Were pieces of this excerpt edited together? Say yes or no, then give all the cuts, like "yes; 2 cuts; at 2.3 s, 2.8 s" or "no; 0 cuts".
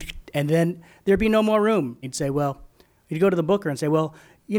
yes; 1 cut; at 2.0 s